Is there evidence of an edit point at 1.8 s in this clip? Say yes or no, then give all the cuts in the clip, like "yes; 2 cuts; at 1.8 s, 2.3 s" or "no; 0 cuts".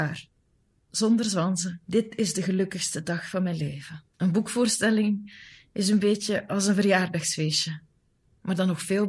yes; 2 cuts; at 1.8 s, 4.1 s